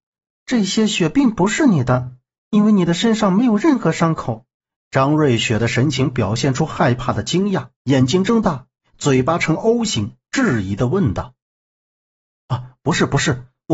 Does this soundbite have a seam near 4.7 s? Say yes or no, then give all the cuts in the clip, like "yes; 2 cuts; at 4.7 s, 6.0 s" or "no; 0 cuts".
yes; 2 cuts; at 4.7 s, 7.7 s